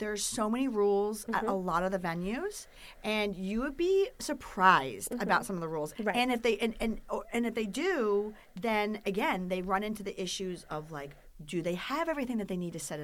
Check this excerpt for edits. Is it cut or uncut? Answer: cut